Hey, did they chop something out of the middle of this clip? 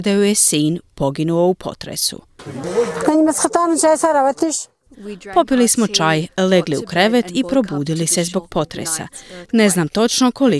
no; 0 cuts

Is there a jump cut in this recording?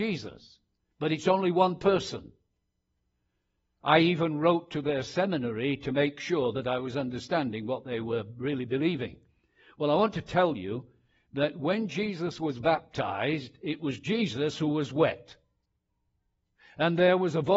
no; 0 cuts

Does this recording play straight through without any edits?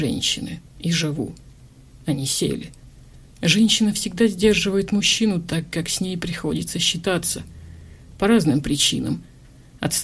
no; 1 cut; at 3.3 s

